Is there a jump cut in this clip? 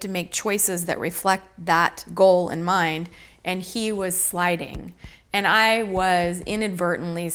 no; 0 cuts

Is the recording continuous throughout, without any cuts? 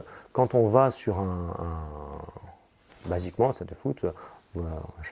no; 1 cut; at 2.9 s

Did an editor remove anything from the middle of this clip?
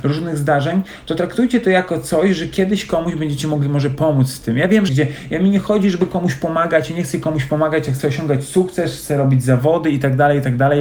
yes; 1 cut; at 4.9 s

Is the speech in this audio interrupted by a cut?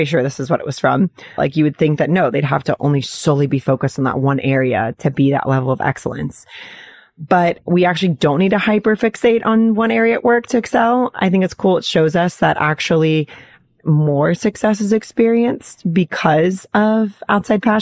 yes; 1 cut; at 1.4 s

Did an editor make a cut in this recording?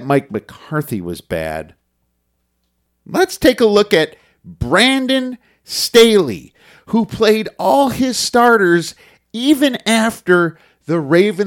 no; 0 cuts

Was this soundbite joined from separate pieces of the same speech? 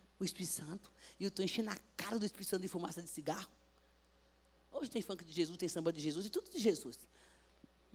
yes; 2 cuts; at 4.6 s, 5.6 s

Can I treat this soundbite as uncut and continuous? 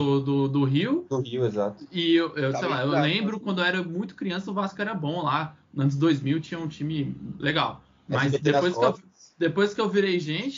yes; 0 cuts

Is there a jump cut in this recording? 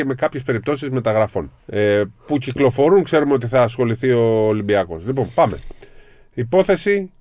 yes; 1 cut; at 1.6 s

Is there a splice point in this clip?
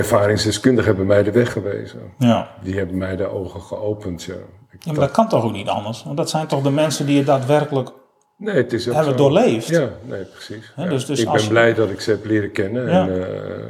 no; 0 cuts

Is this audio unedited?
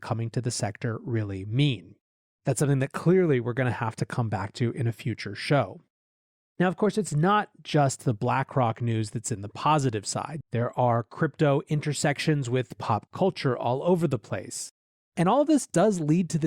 no; 1 cut; at 10.4 s

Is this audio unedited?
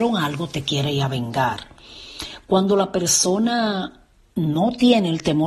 yes; 0 cuts

